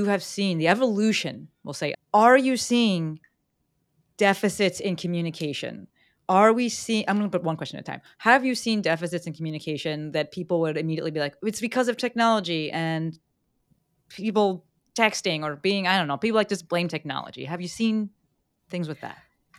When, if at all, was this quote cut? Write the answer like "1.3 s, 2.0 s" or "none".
1.9 s